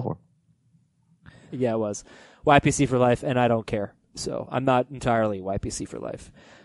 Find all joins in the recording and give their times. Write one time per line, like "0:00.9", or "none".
0:01.5